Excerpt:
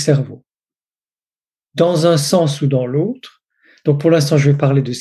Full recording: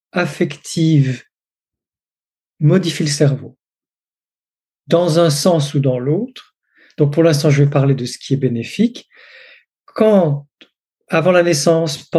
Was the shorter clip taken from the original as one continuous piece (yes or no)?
yes